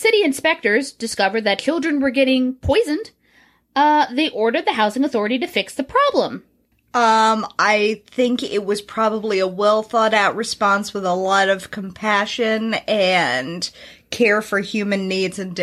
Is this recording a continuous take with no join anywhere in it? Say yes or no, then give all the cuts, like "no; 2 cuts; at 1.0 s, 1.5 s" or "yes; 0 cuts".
no; 1 cut; at 6.7 s